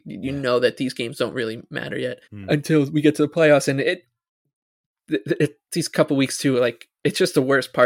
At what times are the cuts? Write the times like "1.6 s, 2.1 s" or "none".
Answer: 2.2 s

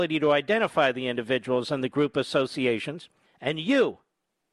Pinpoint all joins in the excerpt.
3.3 s

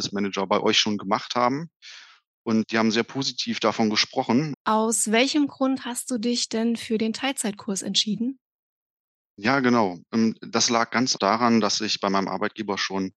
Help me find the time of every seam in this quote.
2.6 s, 4.5 s, 11.2 s

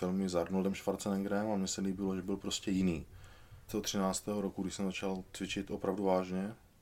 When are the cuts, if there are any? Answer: 3.7 s

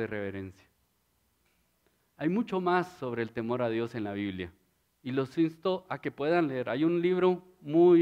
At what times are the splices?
none

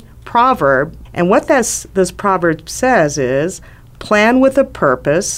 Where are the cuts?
1.1 s

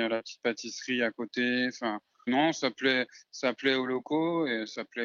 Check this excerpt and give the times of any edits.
2.3 s

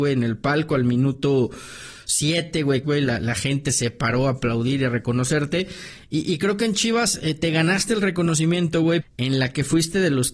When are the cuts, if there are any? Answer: 2.8 s, 9.0 s

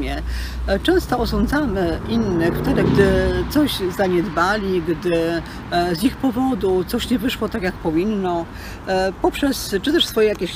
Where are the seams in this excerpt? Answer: 2.8 s

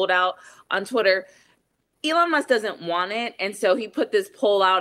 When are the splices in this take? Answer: none

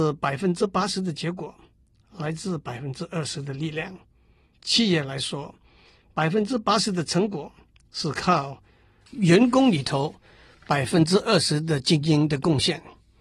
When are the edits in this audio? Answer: 4.5 s

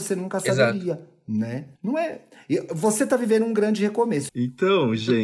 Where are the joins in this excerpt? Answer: 1.7 s, 4.3 s

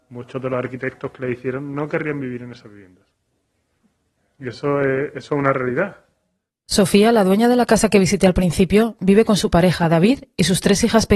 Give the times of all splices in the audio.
none

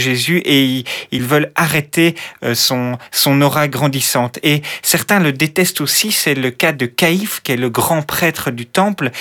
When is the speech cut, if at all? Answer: none

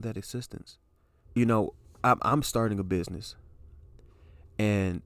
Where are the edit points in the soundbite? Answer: 1.2 s

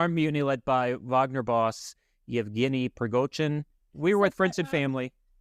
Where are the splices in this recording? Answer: 3.9 s

